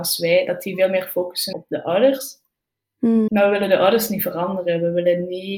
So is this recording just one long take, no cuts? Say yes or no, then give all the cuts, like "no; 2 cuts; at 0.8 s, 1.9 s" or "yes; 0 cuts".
no; 2 cuts; at 1.5 s, 3.3 s